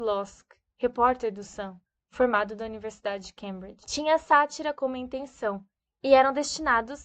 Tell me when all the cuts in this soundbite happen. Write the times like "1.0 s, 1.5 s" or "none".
none